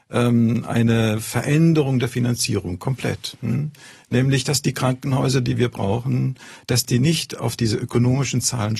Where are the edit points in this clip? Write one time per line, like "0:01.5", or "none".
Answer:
none